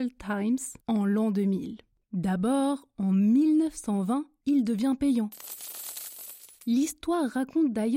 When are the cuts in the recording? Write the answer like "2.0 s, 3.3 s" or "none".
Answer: 2.0 s